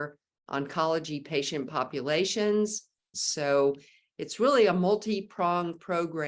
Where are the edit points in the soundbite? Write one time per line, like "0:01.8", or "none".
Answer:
0:03.1